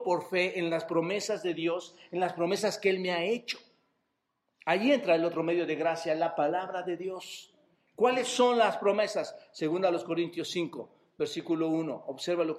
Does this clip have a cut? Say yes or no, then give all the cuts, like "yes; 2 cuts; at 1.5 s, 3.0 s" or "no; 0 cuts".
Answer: no; 0 cuts